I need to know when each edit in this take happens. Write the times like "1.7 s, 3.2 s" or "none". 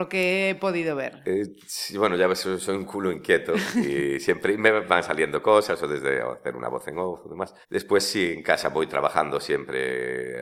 7.6 s